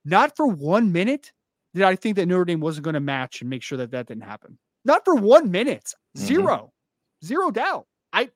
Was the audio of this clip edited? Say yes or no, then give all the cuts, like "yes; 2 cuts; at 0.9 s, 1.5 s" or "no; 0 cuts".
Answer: yes; 1 cut; at 6.0 s